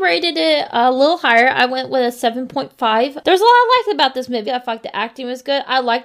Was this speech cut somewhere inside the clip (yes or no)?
yes